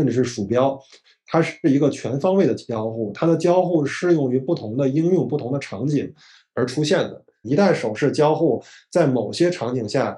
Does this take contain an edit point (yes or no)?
yes